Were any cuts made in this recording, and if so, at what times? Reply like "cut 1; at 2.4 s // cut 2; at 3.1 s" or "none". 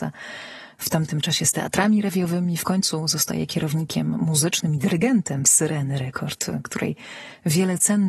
none

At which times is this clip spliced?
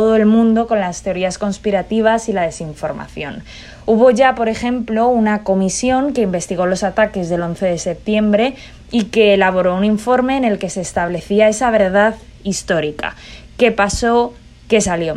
none

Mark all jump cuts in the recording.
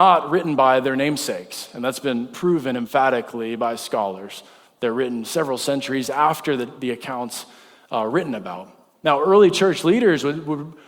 none

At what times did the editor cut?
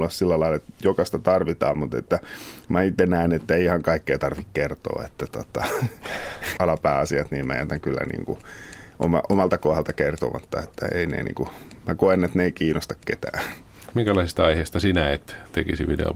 cut 1; at 6.6 s // cut 2; at 13.9 s

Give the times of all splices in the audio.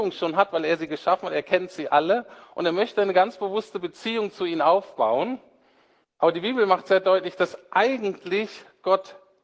cut 1; at 6.0 s

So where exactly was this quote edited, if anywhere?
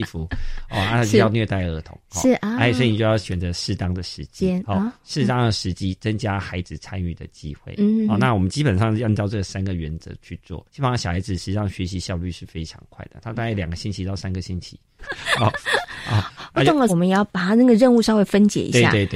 cut 1; at 10.7 s // cut 2; at 15.0 s // cut 3; at 16.9 s

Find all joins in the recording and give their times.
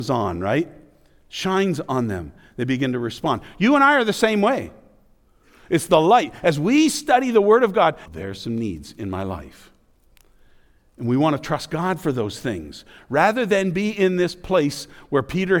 cut 1; at 8.1 s

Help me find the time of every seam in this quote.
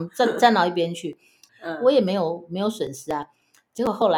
cut 1; at 1.5 s

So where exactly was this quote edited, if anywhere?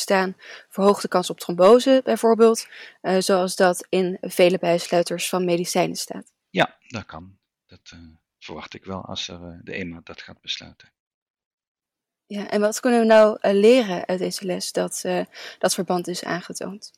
none

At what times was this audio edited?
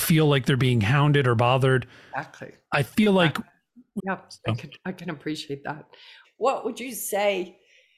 cut 1; at 4.0 s // cut 2; at 6.2 s

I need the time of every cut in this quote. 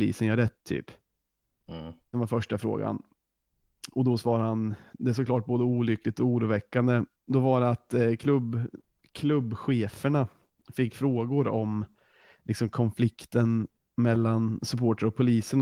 cut 1; at 2.1 s // cut 2; at 7.1 s

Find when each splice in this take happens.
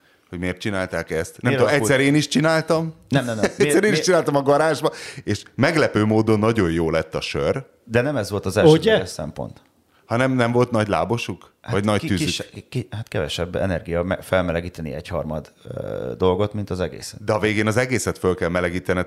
none

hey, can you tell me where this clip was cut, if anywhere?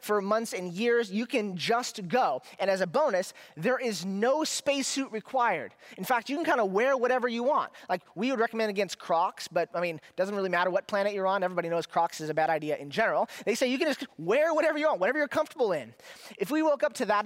none

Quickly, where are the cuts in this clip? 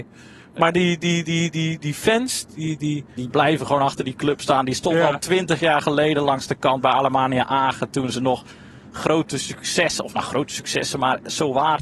cut 1; at 2.5 s

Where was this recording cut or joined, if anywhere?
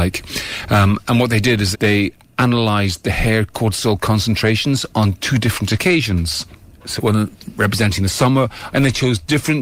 cut 1; at 1.7 s // cut 2; at 7.0 s // cut 3; at 8.7 s

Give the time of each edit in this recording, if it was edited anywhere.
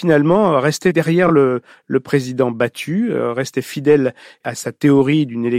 none

